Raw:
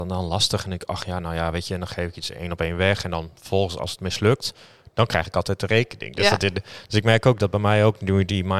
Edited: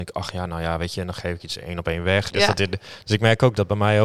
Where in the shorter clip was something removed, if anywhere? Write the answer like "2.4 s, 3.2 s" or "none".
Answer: 2.3 s

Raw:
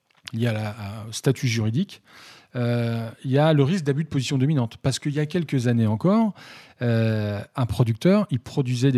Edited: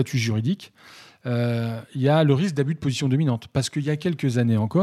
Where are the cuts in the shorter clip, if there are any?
none

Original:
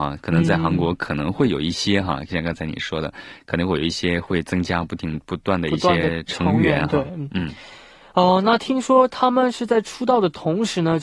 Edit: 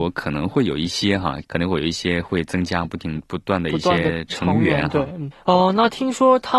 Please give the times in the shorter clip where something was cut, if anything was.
1.4 s, 5.3 s

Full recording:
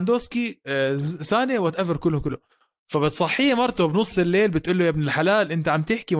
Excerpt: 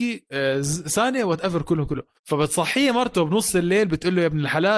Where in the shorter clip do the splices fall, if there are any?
2.2 s

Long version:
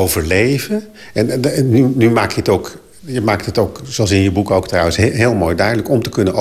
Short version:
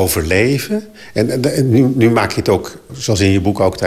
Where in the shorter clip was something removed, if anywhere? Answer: 2.9 s

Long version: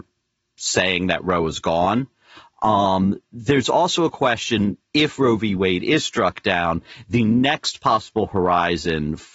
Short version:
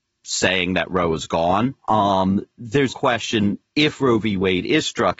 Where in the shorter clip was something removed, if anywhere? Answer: 1.8 s, 2.9 s

